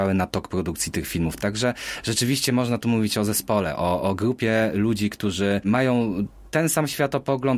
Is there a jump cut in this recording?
no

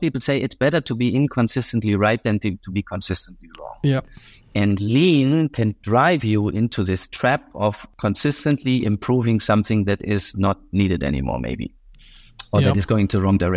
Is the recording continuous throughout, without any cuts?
yes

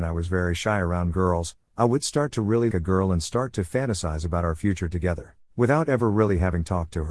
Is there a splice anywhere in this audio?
yes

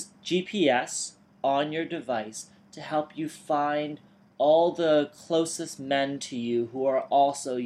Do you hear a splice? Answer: no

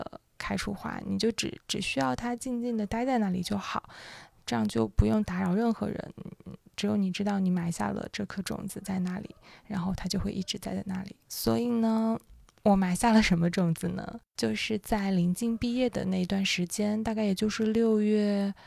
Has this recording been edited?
no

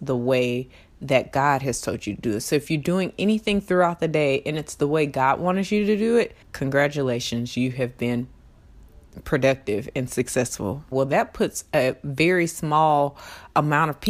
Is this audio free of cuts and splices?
no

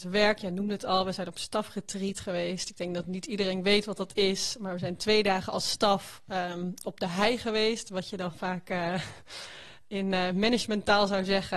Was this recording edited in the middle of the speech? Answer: no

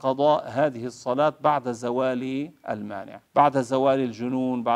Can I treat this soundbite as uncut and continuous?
no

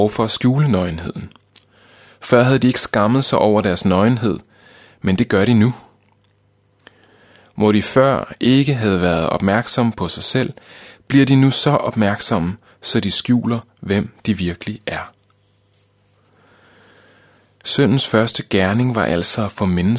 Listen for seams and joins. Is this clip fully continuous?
yes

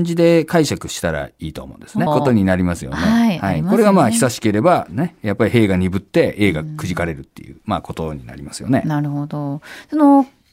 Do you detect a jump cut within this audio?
yes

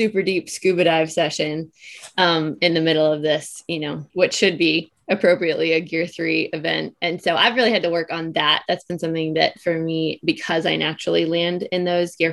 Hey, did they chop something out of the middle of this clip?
no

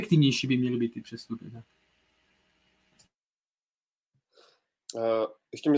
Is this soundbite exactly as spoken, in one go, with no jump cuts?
yes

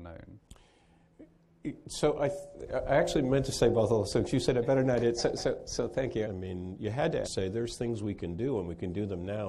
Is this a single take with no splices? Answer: no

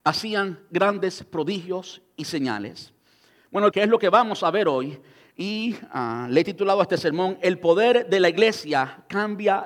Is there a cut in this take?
yes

